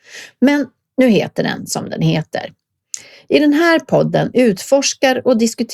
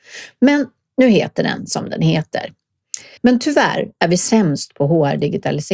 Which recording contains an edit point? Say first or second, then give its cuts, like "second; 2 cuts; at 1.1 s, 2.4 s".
second; 1 cut; at 3.2 s